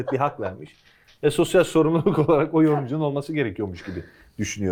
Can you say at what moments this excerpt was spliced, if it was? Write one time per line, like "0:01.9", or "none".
none